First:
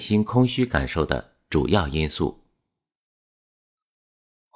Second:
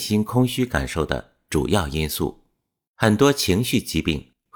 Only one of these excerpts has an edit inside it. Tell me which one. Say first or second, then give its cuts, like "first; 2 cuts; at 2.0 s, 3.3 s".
second; 1 cut; at 2.9 s